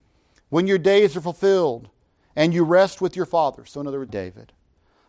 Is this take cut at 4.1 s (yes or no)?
yes